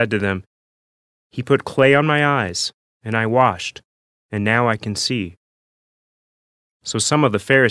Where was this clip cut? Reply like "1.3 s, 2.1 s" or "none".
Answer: none